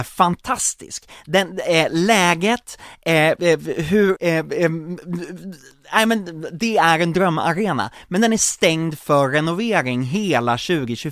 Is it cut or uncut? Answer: cut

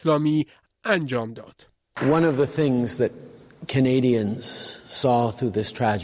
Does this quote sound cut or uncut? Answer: uncut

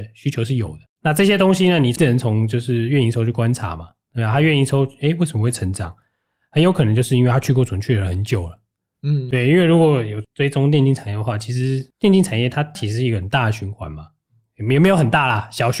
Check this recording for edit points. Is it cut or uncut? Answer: cut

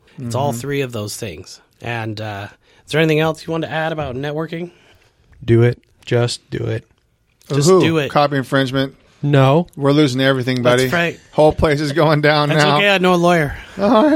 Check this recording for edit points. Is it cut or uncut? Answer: uncut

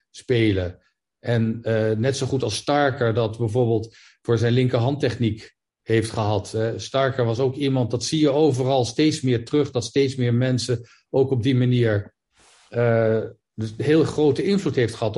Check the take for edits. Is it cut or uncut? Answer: uncut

